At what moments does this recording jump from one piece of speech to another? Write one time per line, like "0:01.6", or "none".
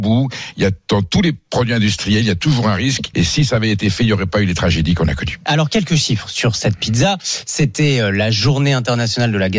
0:03.1